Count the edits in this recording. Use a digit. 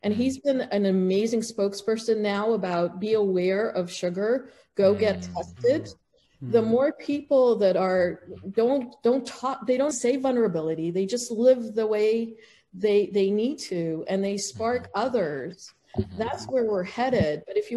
1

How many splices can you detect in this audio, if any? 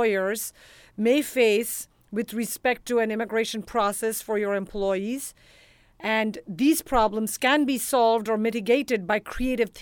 0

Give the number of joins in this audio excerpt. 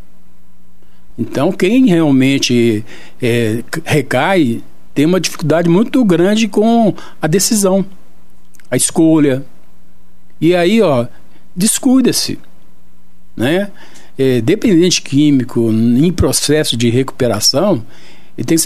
1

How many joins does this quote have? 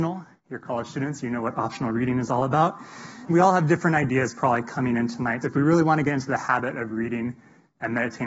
2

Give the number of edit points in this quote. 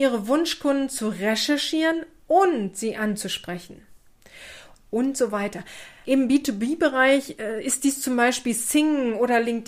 2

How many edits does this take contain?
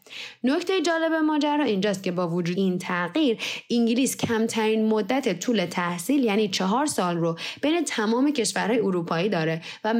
1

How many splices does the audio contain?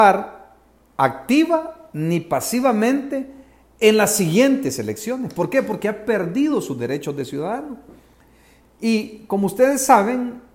0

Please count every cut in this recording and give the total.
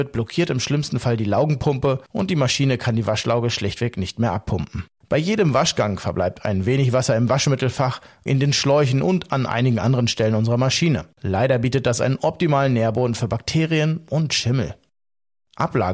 2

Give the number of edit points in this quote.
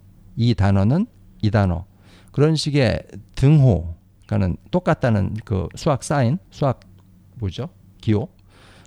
1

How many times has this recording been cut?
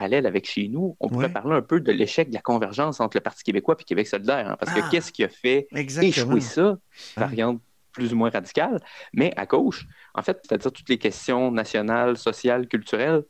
2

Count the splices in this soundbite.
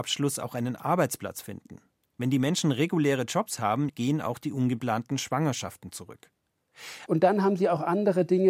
2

